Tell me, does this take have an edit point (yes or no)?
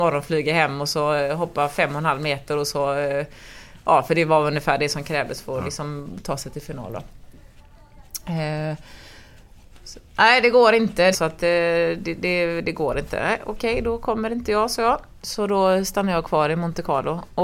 yes